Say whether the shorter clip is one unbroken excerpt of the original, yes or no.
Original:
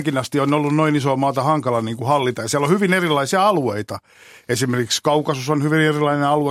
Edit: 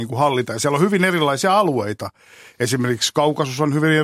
yes